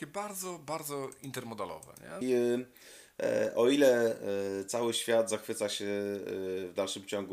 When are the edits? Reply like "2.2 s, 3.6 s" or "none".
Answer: 2.2 s

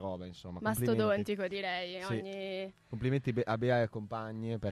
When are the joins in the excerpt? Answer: none

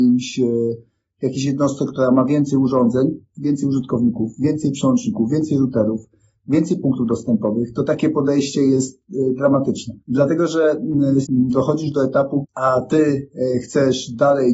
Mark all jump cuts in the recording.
10.0 s, 11.2 s, 12.4 s

